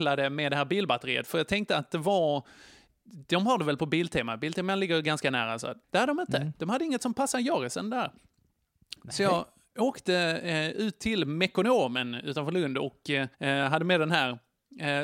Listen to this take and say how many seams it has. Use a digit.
2